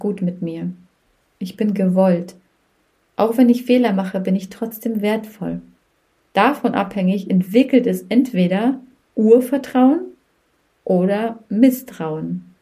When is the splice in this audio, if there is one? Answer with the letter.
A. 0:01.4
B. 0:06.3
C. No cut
B